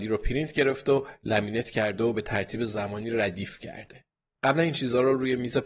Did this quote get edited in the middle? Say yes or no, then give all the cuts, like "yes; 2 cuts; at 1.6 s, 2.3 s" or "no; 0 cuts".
no; 0 cuts